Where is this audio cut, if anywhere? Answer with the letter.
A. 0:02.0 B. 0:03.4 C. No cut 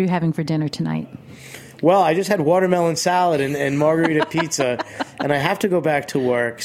C